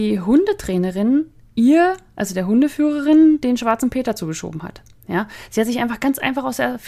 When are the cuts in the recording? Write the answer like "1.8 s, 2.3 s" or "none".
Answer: none

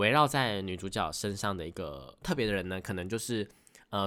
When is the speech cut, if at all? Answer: 2.2 s

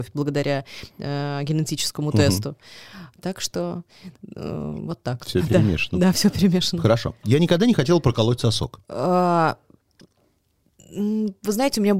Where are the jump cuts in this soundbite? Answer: 8.8 s

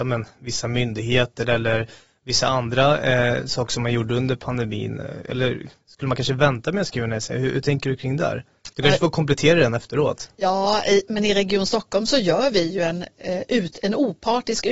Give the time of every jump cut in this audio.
8.7 s

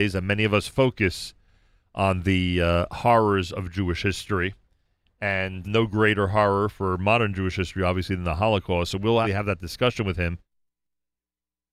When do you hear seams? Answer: 5.6 s, 9.2 s

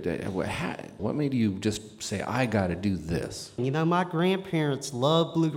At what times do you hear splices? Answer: 1.0 s, 3.6 s

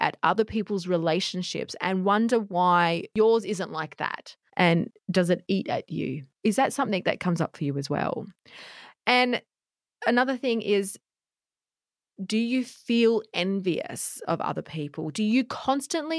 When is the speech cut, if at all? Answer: 4.5 s, 6.3 s

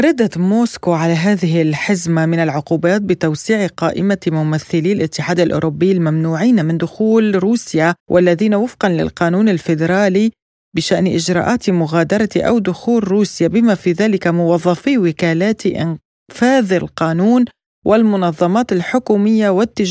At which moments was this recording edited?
8.0 s

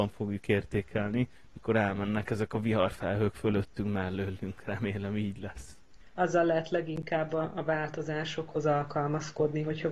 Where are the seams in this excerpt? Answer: none

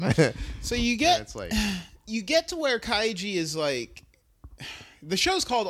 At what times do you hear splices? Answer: none

